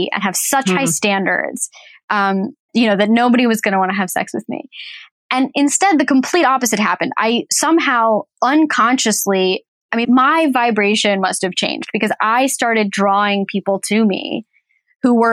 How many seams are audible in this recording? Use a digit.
2